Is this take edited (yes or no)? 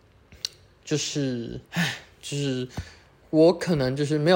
yes